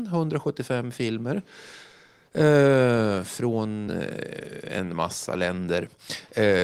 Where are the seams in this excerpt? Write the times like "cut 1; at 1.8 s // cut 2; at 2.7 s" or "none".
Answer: none